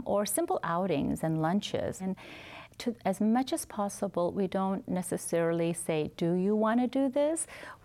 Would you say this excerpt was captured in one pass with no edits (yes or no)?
no